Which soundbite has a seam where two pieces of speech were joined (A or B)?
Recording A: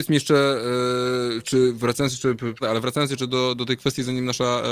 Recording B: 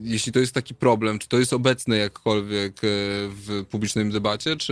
A